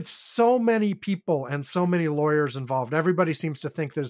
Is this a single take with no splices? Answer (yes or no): yes